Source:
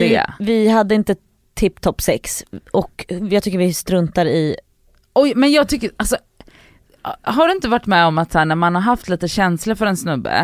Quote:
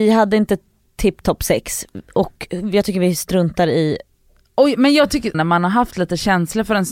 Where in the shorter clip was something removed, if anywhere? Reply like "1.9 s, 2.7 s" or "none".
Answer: 5.3 s